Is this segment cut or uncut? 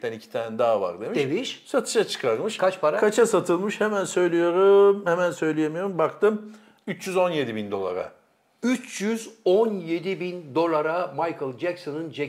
uncut